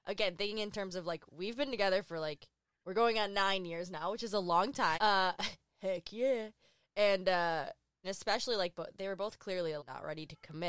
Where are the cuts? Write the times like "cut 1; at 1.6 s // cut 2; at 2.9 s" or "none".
cut 1; at 4.9 s // cut 2; at 8.0 s // cut 3; at 9.8 s